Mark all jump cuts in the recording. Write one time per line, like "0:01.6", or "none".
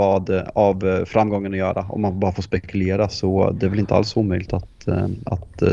none